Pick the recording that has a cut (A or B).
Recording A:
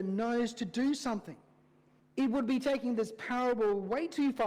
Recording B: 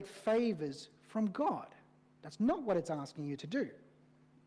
A